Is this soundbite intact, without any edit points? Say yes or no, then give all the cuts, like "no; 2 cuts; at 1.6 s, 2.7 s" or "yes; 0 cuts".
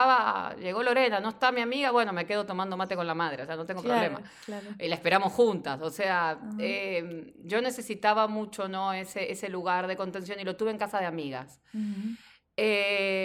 yes; 0 cuts